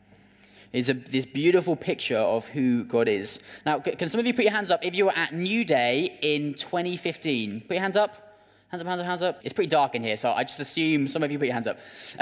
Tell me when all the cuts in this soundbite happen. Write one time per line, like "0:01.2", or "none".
0:09.4